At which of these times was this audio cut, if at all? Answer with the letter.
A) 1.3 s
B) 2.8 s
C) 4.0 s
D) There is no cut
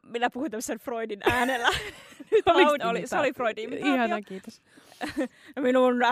B